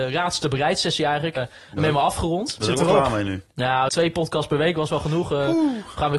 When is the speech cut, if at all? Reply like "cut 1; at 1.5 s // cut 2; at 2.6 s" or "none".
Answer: cut 1; at 1.4 s // cut 2; at 3.9 s